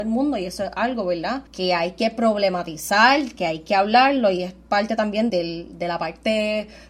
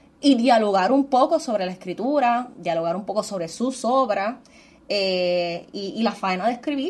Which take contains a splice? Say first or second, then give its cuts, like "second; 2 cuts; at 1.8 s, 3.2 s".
first; 2 cuts; at 1.5 s, 5.3 s